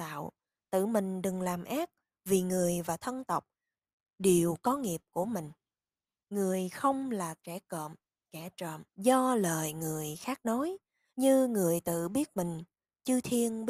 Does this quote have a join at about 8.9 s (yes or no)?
yes